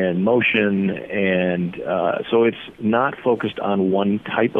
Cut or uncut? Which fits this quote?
uncut